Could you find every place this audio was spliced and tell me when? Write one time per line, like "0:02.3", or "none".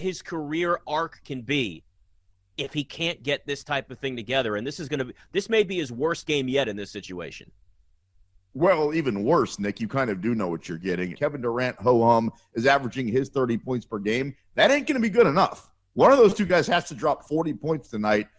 0:11.1